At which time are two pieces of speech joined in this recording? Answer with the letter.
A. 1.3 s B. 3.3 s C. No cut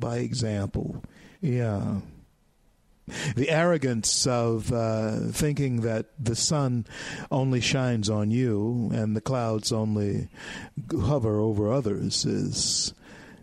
A